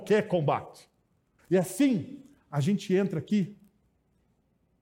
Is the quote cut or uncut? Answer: cut